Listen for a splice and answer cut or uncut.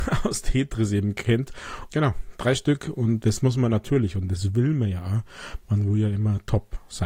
cut